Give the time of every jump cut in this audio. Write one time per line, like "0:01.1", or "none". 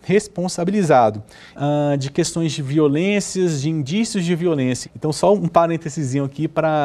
0:01.5
0:04.8

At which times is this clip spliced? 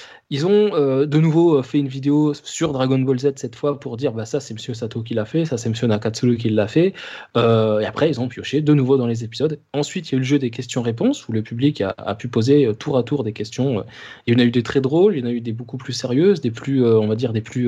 none

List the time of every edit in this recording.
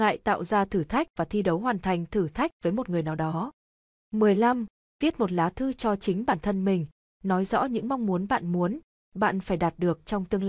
none

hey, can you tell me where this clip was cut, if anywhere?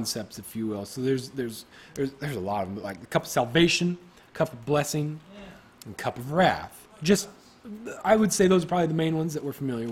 none

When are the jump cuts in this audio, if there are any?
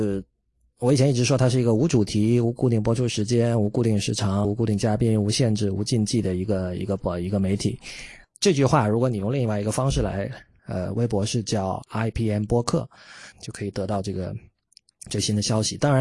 0:04.4
0:10.6
0:13.3

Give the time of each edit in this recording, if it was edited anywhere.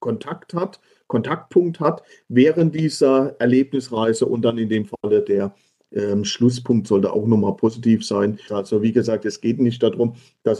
0:08.5

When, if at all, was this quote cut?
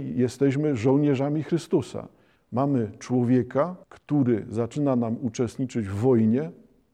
0:02.4
0:03.8

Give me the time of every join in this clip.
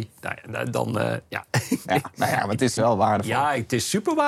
0:02.8

